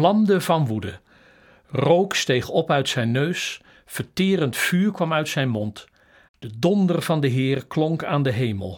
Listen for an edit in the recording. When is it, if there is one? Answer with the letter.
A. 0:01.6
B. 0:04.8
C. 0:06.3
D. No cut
C